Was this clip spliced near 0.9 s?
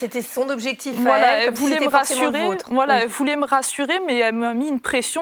no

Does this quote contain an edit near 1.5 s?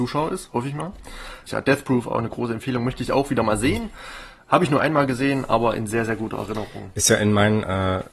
yes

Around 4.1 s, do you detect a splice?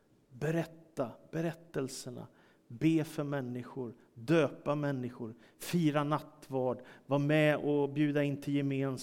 no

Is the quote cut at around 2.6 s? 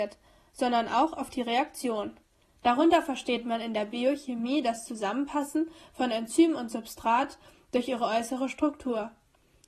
yes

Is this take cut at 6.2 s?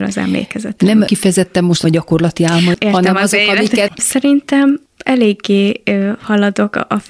no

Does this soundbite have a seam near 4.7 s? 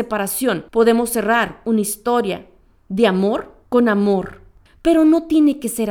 yes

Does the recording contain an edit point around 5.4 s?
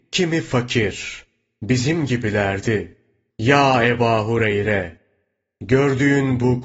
no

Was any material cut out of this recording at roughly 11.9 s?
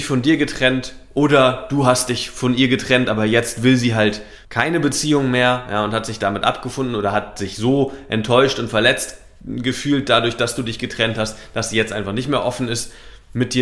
no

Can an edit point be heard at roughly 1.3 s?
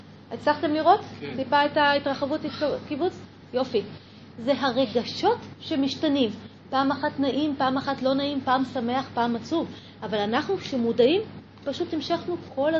no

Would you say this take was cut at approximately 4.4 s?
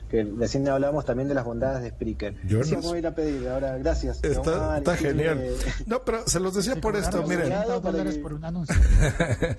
no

